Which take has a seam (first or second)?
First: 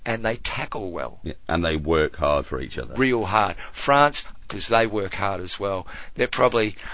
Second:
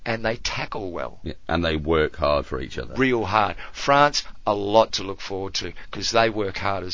first